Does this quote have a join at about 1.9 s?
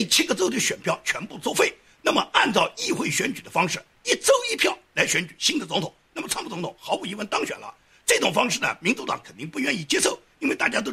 no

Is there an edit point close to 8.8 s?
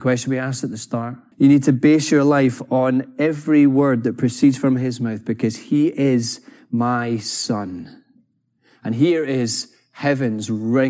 no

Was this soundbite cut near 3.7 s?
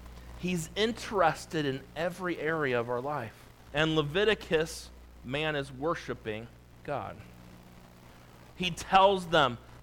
yes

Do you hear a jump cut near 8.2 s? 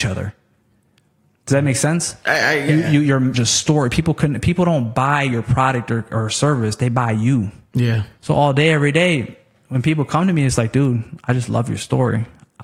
yes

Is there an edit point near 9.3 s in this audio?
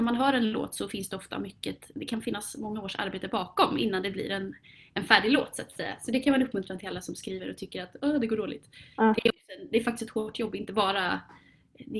no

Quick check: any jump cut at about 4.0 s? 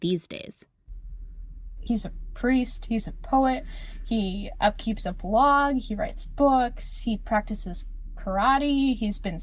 no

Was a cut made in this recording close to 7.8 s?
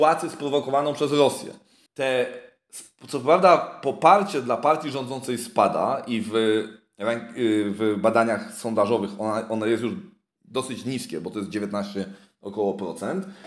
no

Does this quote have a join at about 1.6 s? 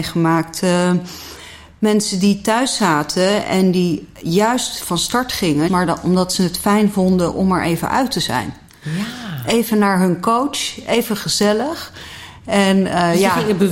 no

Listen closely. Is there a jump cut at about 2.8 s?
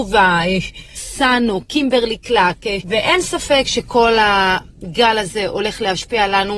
yes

